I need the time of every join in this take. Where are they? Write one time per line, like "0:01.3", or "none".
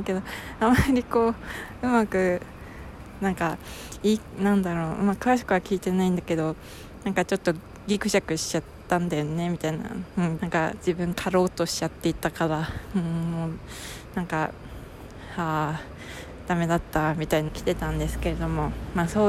0:10.4
0:17.5